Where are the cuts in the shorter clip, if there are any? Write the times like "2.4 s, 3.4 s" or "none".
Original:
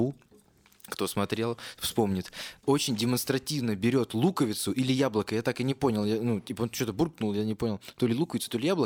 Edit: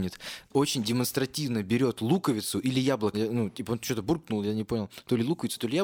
3.1 s